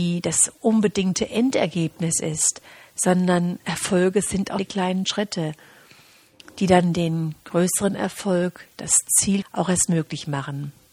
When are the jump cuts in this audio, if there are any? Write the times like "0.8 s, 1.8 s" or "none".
4.6 s, 9.4 s

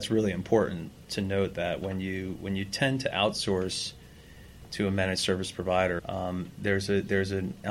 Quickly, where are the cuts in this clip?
6.0 s

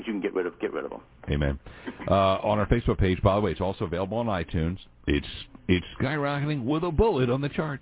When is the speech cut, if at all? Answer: none

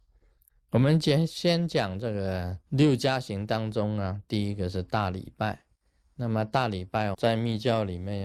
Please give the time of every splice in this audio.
2.7 s, 7.1 s

